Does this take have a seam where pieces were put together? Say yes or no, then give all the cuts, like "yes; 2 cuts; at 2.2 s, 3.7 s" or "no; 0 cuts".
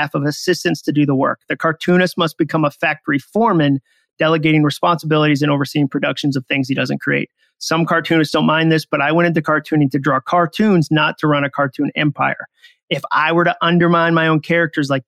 no; 0 cuts